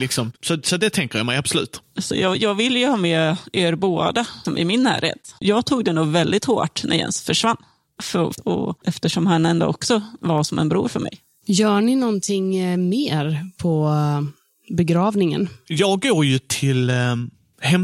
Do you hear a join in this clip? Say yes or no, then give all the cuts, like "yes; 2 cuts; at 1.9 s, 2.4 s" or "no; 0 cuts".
yes; 1 cut; at 8.4 s